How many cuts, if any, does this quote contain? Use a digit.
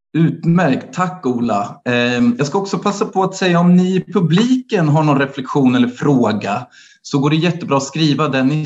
0